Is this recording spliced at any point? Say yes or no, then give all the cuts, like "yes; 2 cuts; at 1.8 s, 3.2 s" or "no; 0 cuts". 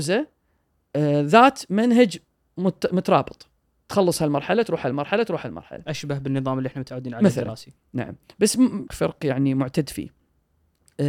yes; 2 cuts; at 7.8 s, 8.9 s